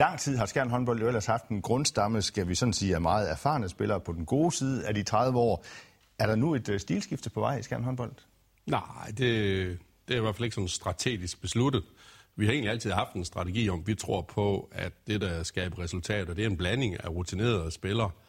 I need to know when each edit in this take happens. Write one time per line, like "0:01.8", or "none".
none